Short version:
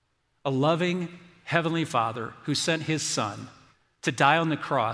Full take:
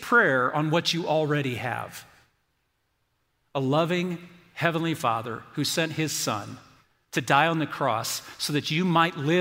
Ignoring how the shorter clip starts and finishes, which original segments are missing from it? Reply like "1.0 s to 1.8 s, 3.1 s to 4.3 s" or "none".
none